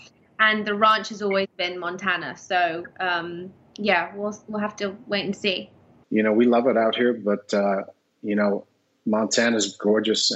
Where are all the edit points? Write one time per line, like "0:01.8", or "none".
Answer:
none